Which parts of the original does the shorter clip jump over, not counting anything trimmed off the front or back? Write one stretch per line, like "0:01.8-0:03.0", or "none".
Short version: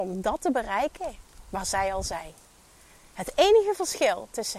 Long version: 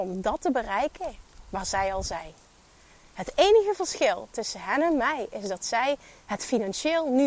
none